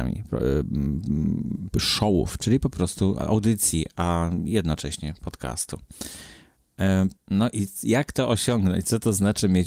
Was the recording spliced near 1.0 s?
no; 2 cuts; at 2.4 s, 7.2 s

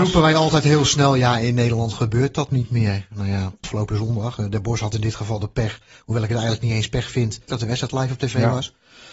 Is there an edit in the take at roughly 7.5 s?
yes; 2 cuts; at 3.6 s, 7.5 s

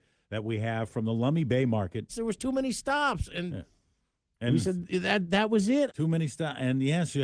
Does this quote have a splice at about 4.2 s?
no; 2 cuts; at 2.1 s, 5.9 s

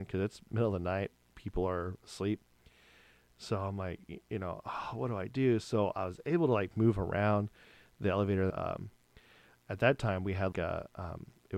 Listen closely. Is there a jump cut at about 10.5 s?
yes; 2 cuts; at 8.5 s, 10.5 s

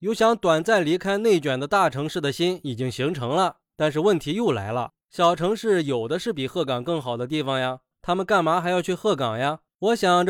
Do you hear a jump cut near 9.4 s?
no; 2 cuts; at 3.6 s, 7.9 s

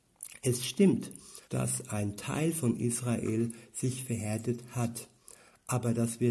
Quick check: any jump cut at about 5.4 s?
no; 1 cut; at 1.4 s

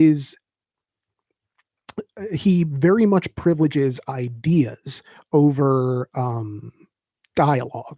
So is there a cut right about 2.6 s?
no; 0 cuts

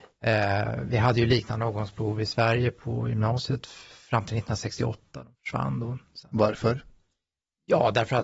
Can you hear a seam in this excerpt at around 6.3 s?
no; 0 cuts

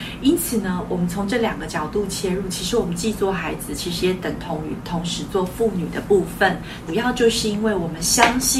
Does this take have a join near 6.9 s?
yes; 1 cut; at 6.9 s

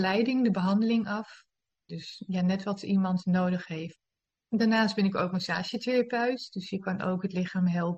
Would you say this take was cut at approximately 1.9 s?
yes; 1 cut; at 1.9 s

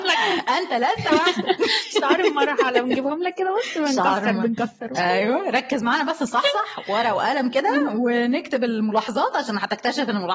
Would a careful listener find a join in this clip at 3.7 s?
no; 1 cut; at 5.0 s

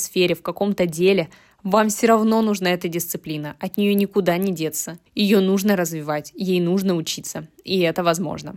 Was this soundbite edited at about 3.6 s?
no; 1 cut; at 5.1 s

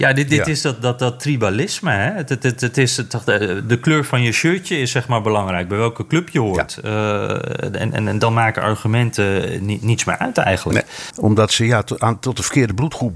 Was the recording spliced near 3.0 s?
no; 1 cut; at 11.1 s

